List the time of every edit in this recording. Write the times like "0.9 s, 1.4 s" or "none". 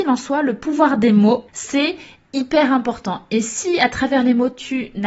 1.5 s